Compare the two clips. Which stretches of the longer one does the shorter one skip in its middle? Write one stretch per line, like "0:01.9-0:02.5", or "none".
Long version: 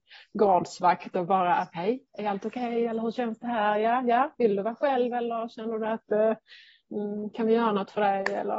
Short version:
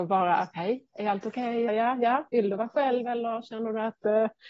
0:02.9-0:03.7